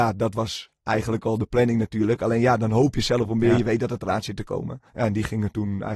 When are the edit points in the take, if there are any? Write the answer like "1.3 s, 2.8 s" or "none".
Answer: 4.9 s